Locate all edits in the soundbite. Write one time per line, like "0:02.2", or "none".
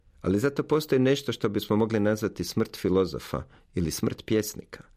none